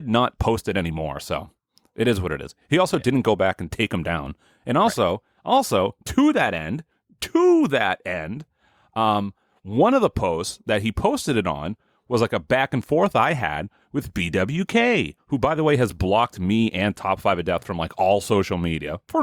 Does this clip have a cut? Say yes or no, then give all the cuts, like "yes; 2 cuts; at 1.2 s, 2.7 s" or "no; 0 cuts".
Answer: no; 0 cuts